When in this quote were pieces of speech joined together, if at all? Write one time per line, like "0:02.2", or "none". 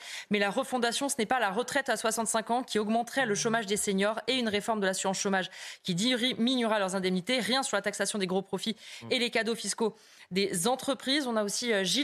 none